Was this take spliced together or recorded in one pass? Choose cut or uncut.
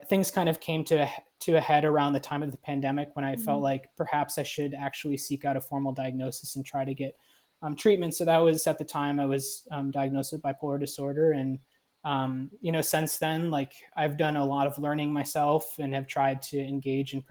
uncut